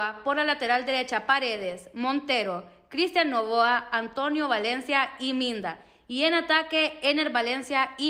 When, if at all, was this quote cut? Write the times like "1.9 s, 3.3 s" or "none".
none